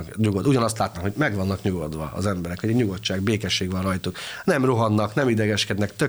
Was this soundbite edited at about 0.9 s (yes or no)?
yes